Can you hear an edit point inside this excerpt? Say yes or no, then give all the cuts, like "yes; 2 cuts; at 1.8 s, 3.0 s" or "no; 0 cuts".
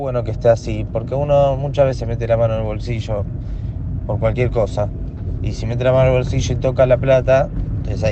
no; 0 cuts